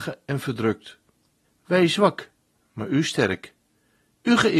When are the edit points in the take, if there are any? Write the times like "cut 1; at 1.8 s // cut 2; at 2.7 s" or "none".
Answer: cut 1; at 1.4 s